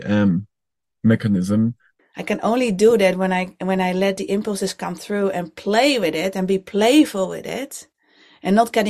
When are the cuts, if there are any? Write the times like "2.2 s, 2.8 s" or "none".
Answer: 2.0 s